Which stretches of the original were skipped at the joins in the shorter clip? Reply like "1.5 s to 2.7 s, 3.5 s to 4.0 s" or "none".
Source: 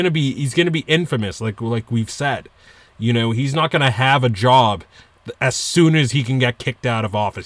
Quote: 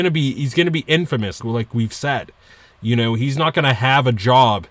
1.4 s to 1.6 s